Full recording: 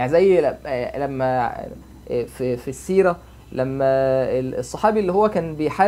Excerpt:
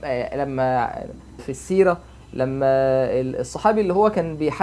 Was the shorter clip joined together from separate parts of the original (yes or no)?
yes